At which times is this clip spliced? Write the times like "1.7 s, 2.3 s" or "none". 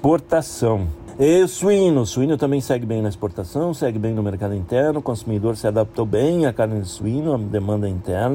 none